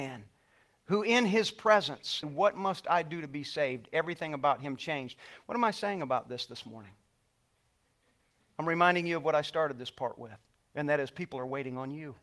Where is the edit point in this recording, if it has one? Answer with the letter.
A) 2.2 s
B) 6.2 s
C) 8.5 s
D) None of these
A